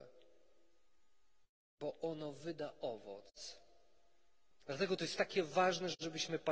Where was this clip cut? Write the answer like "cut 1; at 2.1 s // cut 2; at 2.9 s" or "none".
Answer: cut 1; at 4.5 s